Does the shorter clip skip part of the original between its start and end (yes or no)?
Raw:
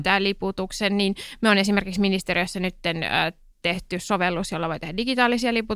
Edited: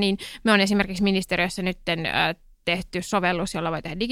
no